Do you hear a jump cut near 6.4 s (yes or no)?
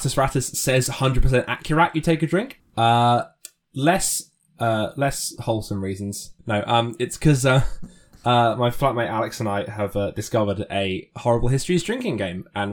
yes